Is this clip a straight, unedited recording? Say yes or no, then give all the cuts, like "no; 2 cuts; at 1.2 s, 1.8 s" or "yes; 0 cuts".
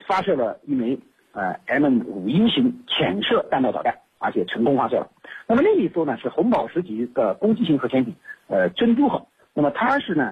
yes; 0 cuts